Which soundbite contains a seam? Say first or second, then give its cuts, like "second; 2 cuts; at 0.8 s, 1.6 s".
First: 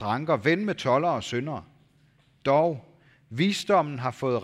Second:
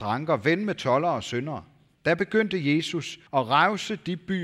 second; 2 cuts; at 1.9 s, 3.3 s